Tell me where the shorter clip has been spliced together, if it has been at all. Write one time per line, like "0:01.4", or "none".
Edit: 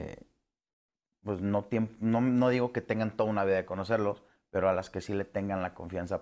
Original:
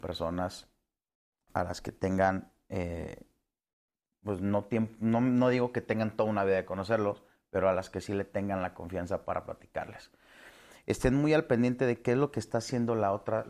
none